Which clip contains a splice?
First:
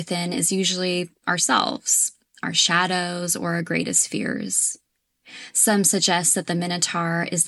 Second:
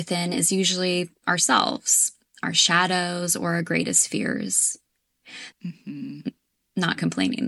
second; 1 cut; at 5.5 s

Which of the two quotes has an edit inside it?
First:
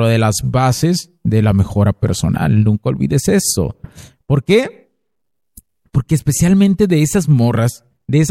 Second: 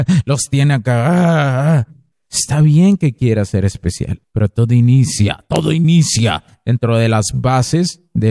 second; 2 cuts; at 2.1 s, 4.2 s

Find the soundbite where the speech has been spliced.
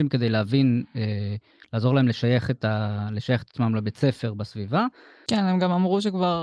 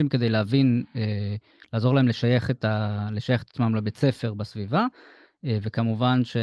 first; 1 cut; at 5.3 s

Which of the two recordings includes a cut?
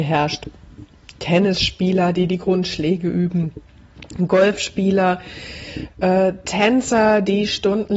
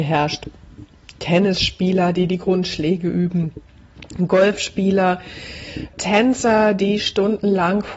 second; 1 cut; at 5.9 s

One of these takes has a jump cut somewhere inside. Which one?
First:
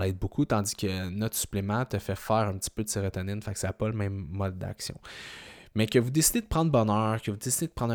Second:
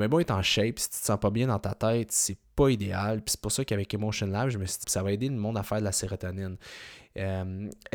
second; 1 cut; at 4.8 s

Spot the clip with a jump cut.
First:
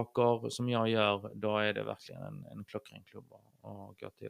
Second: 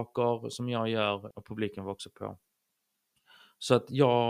second; 1 cut; at 1.3 s

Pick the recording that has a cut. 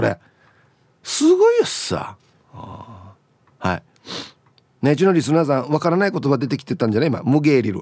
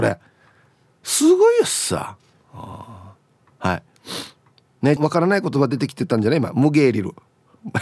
second; 1 cut; at 5.0 s

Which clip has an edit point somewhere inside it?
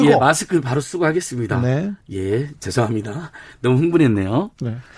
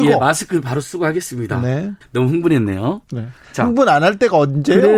second; 1 cut; at 2.0 s

